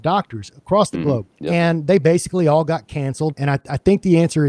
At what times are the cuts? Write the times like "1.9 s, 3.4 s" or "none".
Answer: 1.3 s, 3.3 s